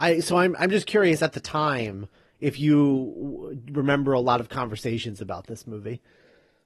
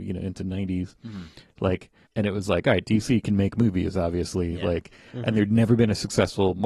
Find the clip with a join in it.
second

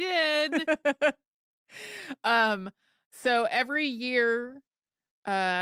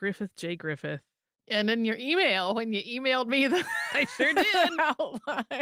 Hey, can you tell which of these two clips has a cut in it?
second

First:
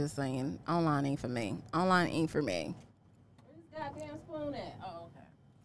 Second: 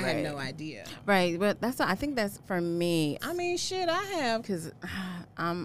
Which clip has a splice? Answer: second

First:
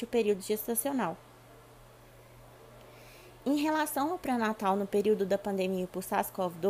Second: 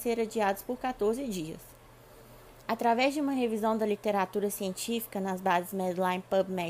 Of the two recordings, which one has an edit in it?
second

